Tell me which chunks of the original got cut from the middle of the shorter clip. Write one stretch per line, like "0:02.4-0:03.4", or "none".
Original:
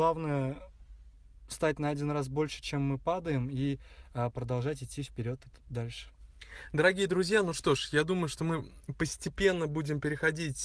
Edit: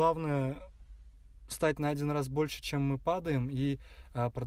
none